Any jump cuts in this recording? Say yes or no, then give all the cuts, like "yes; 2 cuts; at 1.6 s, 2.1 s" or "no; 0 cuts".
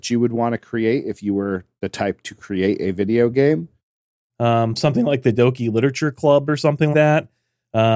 yes; 3 cuts; at 4.3 s, 5.3 s, 6.9 s